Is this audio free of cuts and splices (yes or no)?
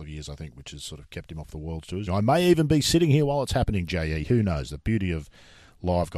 no